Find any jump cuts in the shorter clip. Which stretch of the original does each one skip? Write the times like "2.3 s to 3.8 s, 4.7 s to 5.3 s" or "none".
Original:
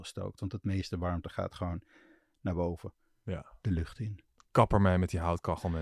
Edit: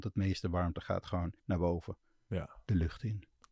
1.9 s to 2.3 s